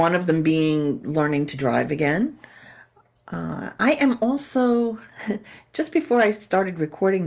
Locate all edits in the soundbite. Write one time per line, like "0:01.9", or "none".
0:03.2